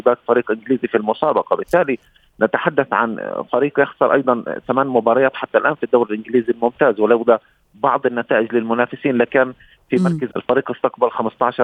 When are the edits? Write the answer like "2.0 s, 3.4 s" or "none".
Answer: 10.3 s